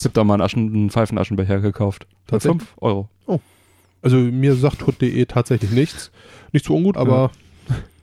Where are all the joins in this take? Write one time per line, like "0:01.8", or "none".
0:06.9